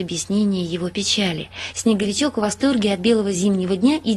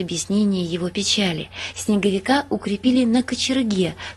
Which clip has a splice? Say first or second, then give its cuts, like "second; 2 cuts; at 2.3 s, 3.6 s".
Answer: first; 1 cut; at 1.7 s